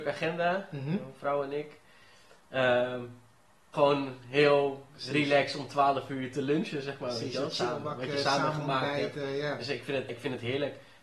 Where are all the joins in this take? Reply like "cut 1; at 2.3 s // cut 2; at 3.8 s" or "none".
cut 1; at 3.7 s // cut 2; at 10.1 s

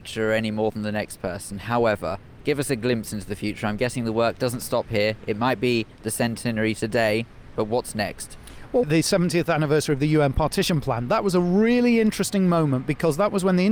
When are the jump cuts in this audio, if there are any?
cut 1; at 8.8 s

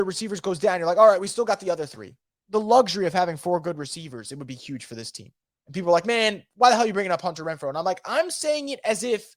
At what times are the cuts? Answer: cut 1; at 5.6 s

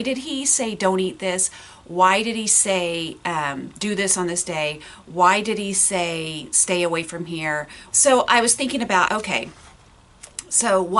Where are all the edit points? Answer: cut 1; at 7.9 s // cut 2; at 9.1 s

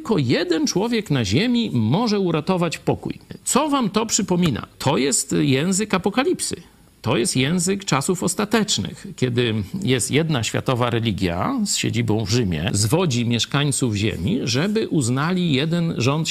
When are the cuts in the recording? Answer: none

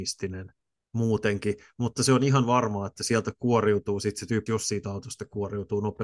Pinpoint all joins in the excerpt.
cut 1; at 4.5 s

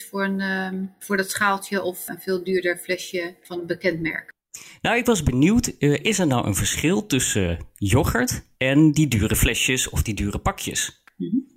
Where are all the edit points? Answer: cut 1; at 8.5 s

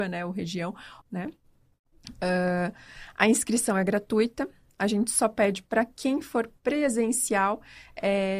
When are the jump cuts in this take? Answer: cut 1; at 1.0 s

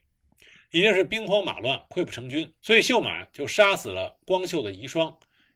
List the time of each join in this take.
cut 1; at 2.6 s

